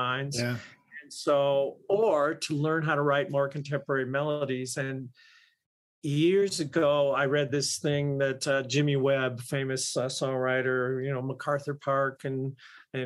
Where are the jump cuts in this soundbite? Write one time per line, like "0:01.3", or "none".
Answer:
none